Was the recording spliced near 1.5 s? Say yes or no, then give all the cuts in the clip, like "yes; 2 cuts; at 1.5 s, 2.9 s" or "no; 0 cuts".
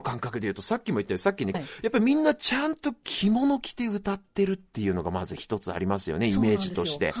yes; 1 cut; at 1.5 s